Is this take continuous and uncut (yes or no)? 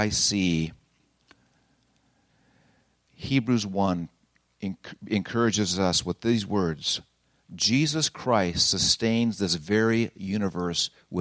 yes